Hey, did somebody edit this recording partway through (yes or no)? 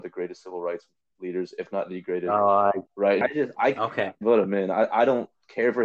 yes